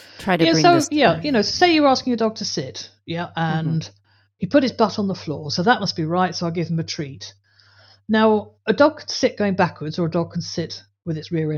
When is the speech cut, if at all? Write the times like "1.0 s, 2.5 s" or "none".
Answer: none